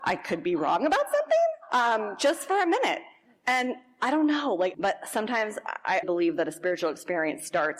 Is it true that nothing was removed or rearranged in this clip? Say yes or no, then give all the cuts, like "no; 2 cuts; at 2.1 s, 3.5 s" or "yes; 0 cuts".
no; 2 cuts; at 4.7 s, 6.0 s